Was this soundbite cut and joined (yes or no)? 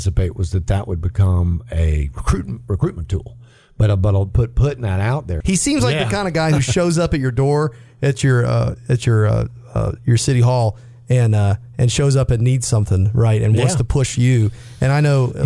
yes